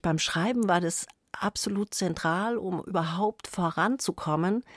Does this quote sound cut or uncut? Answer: uncut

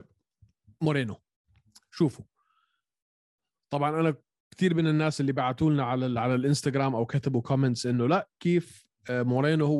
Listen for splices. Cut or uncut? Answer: uncut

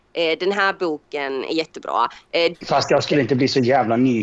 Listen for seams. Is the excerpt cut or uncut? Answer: cut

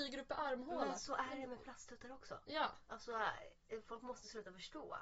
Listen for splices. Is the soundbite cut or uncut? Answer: uncut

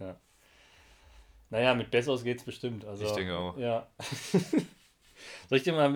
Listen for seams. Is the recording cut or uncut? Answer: uncut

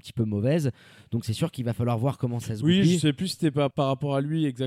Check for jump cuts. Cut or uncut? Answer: cut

